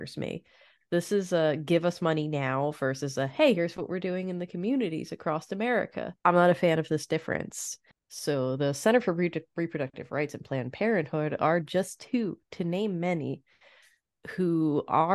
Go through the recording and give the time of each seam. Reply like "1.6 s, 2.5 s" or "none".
6.2 s, 7.9 s